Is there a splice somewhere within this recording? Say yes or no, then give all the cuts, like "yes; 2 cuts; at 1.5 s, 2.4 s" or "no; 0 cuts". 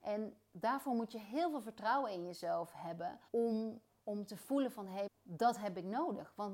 yes; 2 cuts; at 3.3 s, 5.1 s